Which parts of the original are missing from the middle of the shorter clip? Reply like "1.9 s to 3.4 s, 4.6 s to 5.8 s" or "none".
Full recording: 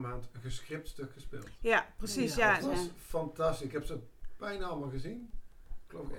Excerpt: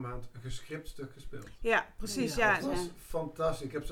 none